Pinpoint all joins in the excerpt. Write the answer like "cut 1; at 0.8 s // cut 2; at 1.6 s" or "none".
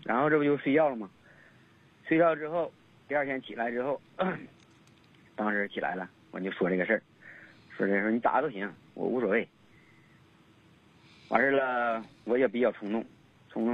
none